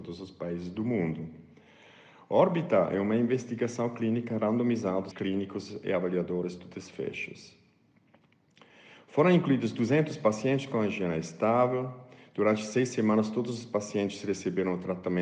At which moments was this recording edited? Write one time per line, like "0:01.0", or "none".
0:05.1